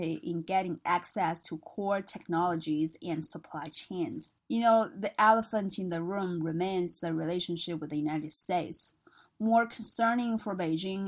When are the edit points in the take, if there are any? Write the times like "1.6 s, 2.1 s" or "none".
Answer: 4.4 s

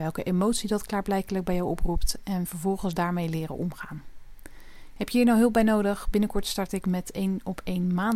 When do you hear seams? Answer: none

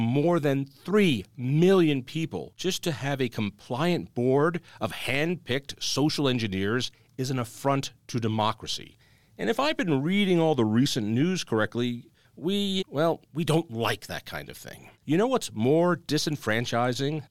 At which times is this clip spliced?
12.8 s, 14.9 s

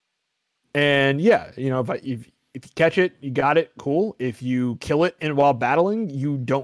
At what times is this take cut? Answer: none

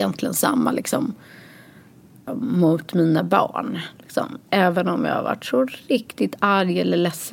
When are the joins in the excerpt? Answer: 2.3 s

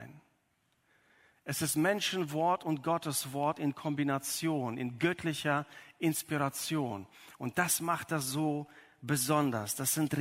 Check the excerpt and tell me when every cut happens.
none

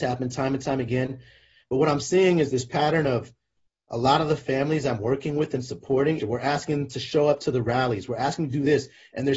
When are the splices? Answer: 6.2 s

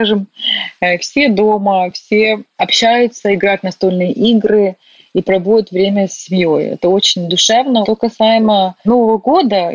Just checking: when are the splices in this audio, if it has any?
none

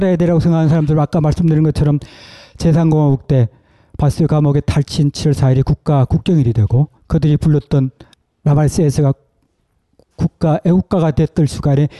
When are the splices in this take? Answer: 7.0 s

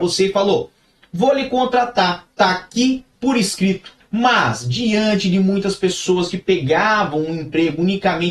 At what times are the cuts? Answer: 2.3 s, 4.0 s

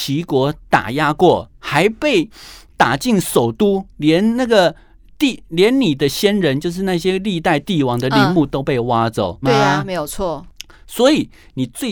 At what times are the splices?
9.4 s

